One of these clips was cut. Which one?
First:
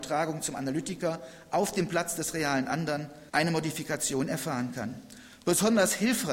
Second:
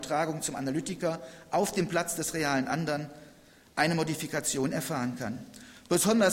first; 1 cut; at 3.3 s

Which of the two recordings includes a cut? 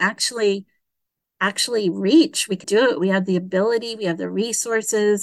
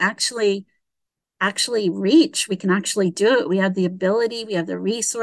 first; 1 cut; at 2.6 s

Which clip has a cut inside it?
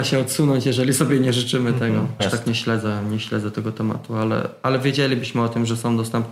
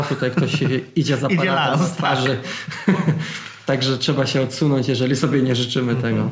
first; 1 cut; at 2.2 s

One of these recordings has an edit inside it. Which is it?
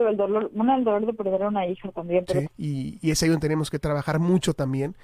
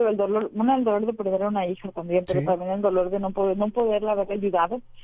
first; 1 cut; at 2.5 s

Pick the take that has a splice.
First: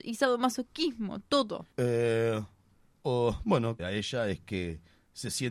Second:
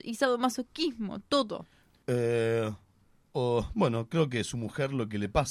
first; 2 cuts; at 1.7 s, 3.8 s

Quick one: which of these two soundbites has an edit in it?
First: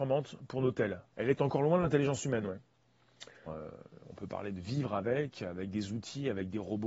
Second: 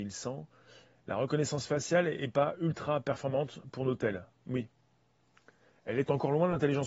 first; 2 cuts; at 1.1 s, 3.5 s

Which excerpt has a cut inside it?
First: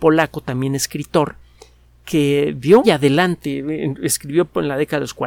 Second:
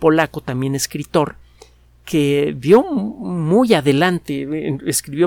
first; 1 cut; at 2.8 s

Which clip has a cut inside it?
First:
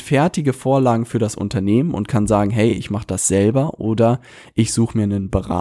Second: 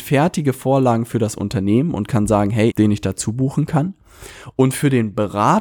second; 1 cut; at 2.7 s

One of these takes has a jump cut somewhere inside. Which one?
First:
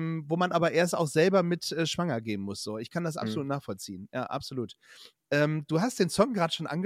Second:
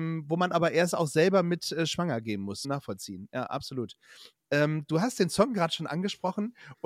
second; 1 cut; at 2.6 s

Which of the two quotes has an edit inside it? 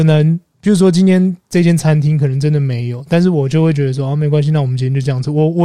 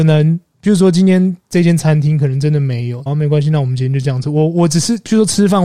second; 1 cut; at 3.1 s

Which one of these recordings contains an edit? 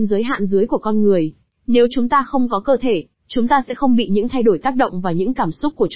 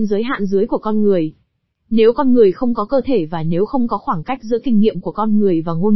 first; 2 cuts; at 1.5 s, 3.2 s

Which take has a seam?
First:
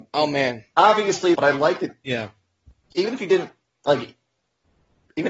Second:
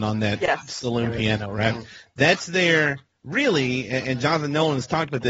first; 1 cut; at 1.3 s

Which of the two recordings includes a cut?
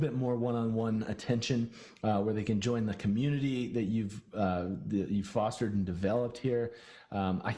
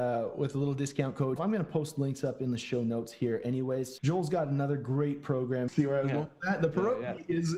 second; 3 cuts; at 1.4 s, 4.0 s, 5.7 s

